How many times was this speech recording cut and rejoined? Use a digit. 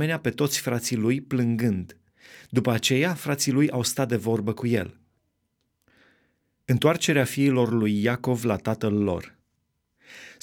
0